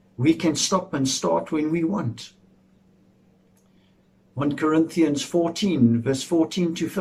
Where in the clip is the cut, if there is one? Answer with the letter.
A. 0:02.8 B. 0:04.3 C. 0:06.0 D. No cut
D